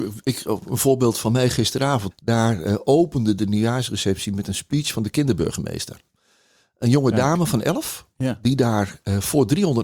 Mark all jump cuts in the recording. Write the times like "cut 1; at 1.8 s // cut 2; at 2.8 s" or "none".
cut 1; at 2.1 s